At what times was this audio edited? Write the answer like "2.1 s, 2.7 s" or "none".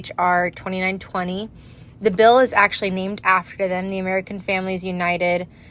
1.9 s